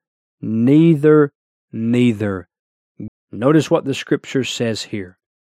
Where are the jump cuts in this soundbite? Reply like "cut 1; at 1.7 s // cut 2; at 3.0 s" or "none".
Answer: cut 1; at 1.6 s // cut 2; at 3.1 s